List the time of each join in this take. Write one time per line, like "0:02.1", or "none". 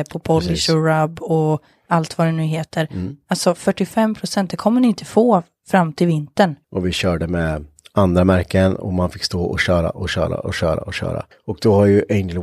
0:06.6
0:11.3